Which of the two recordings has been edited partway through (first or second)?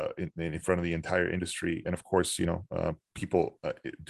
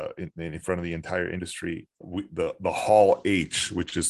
second